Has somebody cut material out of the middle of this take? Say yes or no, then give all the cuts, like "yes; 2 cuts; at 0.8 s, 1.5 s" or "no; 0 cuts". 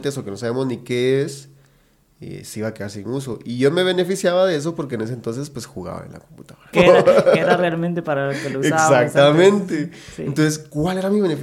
yes; 1 cut; at 6.7 s